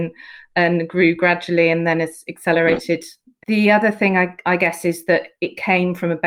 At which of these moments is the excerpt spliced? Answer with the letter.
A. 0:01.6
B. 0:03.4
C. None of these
B